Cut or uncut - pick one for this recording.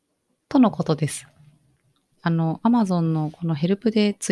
cut